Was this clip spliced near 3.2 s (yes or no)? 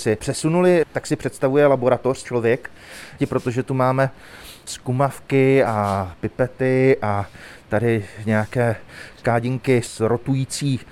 yes